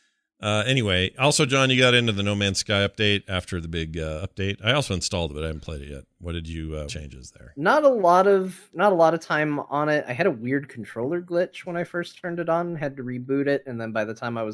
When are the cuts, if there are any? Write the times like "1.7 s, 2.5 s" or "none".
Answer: 6.9 s